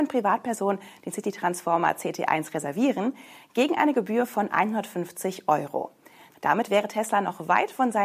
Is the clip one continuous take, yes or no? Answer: no